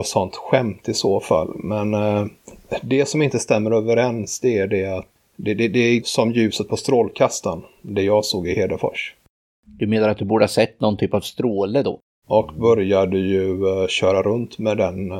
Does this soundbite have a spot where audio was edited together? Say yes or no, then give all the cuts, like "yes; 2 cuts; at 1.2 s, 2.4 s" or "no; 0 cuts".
yes; 2 cuts; at 6.0 s, 12.2 s